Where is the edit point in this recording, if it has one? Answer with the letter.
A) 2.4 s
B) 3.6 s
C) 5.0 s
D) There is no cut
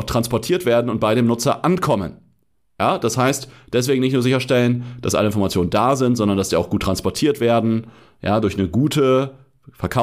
D